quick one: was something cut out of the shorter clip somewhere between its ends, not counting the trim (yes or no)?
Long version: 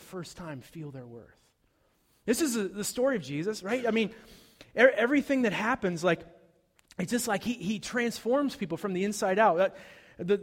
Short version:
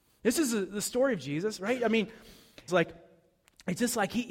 yes